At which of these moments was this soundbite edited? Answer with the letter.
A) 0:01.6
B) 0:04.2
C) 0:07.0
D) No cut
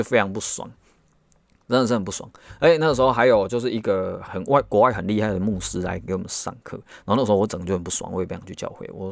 B